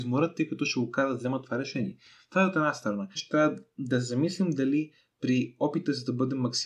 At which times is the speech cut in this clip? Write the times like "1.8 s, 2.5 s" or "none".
3.2 s